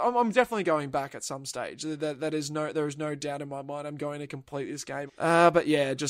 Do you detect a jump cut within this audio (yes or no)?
yes